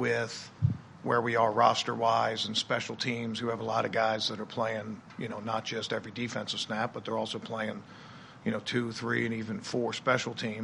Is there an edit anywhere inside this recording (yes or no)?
no